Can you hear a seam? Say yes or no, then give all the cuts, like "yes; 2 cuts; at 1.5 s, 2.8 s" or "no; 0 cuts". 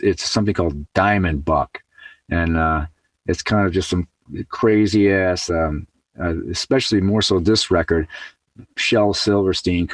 no; 0 cuts